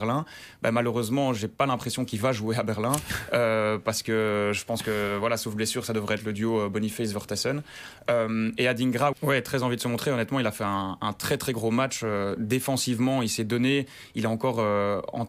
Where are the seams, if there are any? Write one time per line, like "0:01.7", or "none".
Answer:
0:09.1